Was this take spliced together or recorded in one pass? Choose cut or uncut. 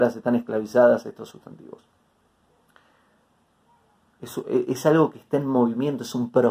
cut